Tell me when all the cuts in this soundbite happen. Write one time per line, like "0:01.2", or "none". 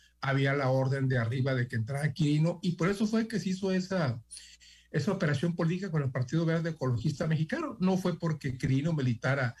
none